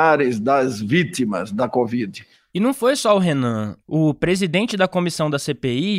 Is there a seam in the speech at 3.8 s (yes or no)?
no